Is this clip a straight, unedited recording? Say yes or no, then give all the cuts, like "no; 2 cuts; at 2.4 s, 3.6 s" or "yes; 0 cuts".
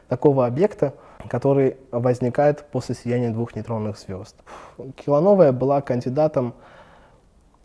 no; 1 cut; at 4.4 s